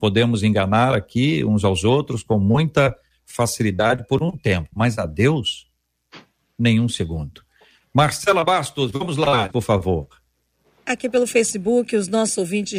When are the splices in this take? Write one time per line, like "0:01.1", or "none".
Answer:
0:09.5